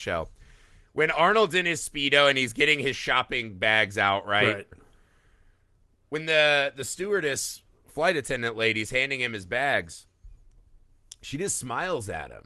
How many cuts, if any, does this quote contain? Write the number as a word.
one